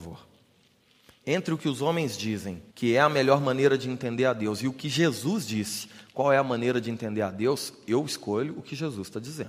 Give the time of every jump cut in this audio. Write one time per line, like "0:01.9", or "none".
0:02.7